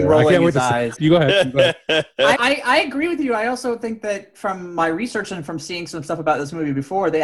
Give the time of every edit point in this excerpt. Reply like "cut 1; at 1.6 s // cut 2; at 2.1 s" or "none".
cut 1; at 1.0 s // cut 2; at 2.4 s